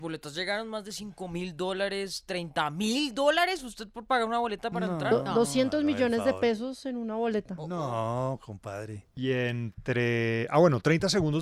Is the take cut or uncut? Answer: uncut